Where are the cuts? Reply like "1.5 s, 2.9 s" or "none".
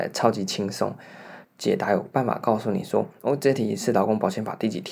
1.4 s